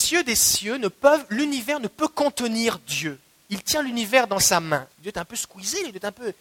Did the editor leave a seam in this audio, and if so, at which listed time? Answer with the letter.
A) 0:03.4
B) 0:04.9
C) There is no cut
B